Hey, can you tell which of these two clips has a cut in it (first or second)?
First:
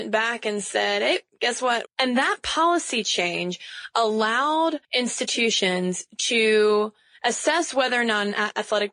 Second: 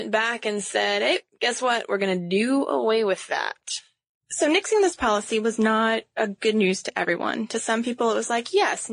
first